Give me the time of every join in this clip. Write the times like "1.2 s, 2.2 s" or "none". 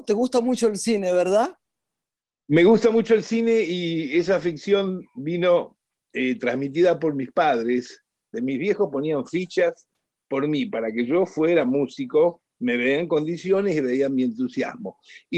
8.3 s